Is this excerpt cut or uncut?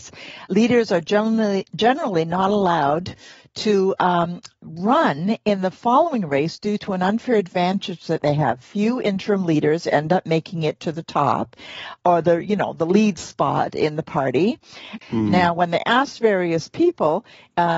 cut